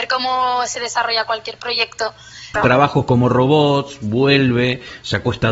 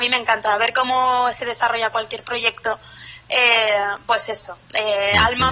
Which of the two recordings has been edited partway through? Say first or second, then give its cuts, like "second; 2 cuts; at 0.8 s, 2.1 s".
first; 1 cut; at 2.5 s